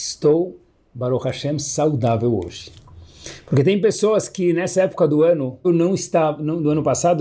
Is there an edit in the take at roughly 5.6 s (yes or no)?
yes